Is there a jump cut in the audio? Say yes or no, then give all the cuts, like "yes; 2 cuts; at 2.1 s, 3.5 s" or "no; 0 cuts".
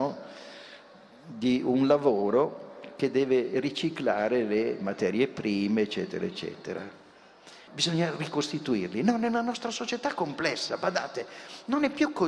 yes; 1 cut; at 7.7 s